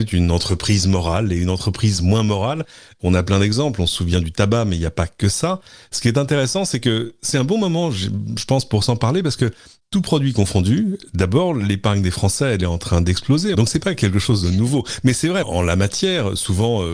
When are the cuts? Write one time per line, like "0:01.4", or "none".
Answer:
0:13.5
0:15.4